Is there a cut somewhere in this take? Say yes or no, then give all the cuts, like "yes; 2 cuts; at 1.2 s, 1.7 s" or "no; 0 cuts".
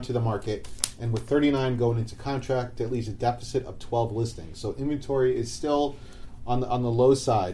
no; 0 cuts